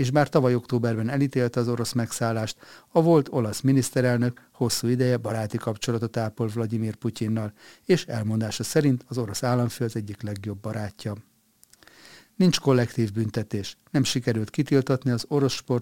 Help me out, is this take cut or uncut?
uncut